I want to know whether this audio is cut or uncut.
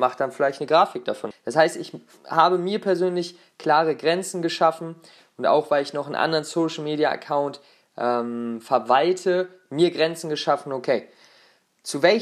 cut